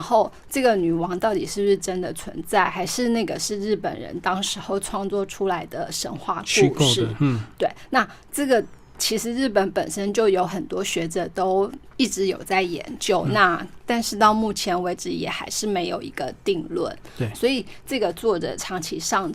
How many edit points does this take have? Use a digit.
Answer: 0